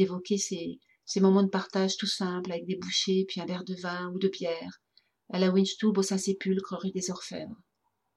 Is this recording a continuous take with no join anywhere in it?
yes; 0 cuts

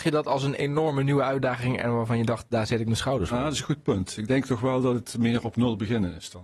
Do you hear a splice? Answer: no; 0 cuts

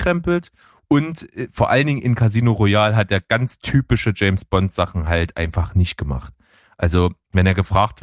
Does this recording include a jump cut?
no; 0 cuts

